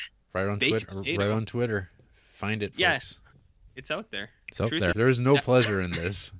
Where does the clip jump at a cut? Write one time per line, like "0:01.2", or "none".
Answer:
0:04.9

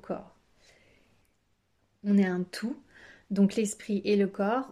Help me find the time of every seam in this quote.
none

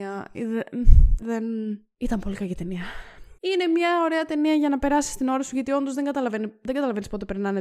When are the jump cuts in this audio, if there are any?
0:01.2
0:03.3

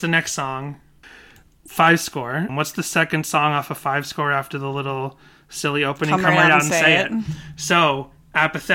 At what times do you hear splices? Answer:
0:01.0
0:02.5

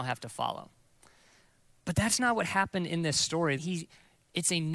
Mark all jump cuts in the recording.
0:03.6

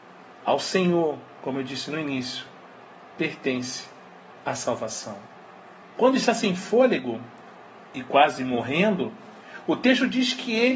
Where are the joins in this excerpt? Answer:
0:05.8

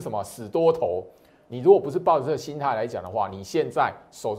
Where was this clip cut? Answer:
none

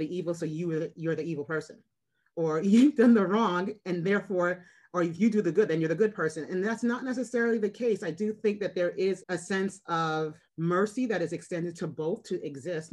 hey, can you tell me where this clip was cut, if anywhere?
0:09.2
0:10.5

